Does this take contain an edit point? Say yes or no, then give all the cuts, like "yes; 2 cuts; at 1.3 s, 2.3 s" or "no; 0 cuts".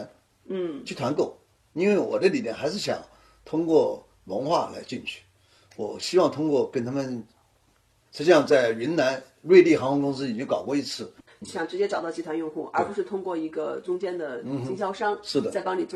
yes; 1 cut; at 8.0 s